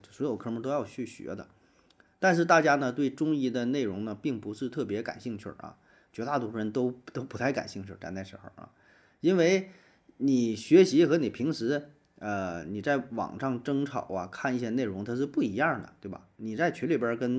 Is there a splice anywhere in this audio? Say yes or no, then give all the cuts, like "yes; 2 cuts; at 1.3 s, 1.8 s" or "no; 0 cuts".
no; 0 cuts